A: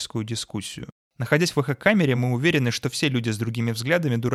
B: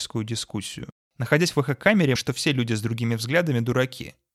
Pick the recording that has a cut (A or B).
B